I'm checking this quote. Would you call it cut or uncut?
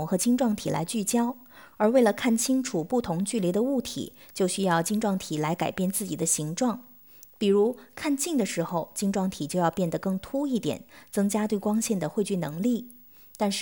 uncut